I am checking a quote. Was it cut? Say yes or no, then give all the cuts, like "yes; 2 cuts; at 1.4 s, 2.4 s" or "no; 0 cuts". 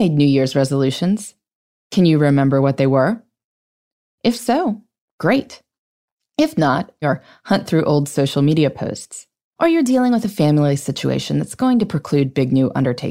yes; 2 cuts; at 7.0 s, 9.6 s